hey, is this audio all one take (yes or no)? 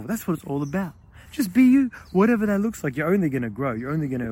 yes